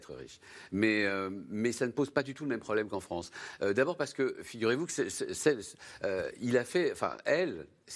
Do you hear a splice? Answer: no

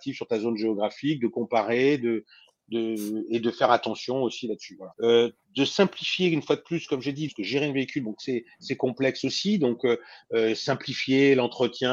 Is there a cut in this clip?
yes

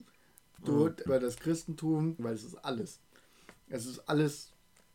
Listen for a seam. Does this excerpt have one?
yes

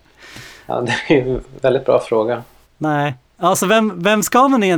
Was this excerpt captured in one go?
no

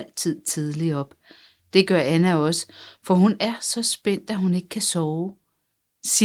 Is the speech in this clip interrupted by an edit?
no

